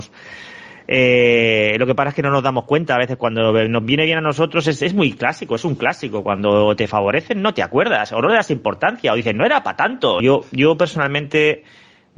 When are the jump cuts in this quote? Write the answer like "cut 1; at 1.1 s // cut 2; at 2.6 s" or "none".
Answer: cut 1; at 10.2 s